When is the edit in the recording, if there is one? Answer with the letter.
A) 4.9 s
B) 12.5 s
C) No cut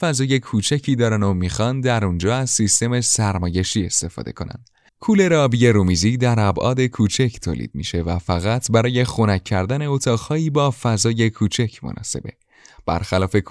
A